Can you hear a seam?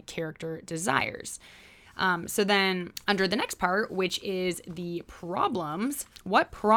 no; 0 cuts

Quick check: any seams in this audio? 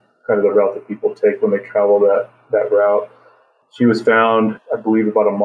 no; 0 cuts

